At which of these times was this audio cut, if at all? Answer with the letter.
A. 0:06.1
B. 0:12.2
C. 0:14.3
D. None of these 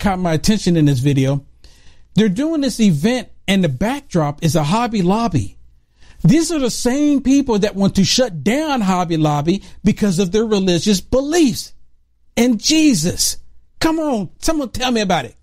C